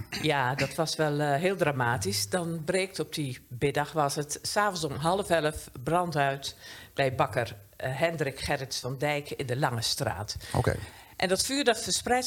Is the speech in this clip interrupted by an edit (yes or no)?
no